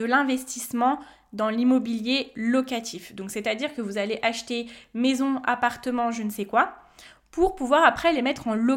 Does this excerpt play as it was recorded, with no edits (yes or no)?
yes